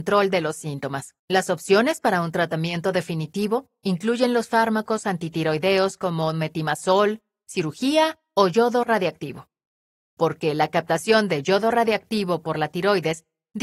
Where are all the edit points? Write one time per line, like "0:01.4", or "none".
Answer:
0:01.2
0:10.1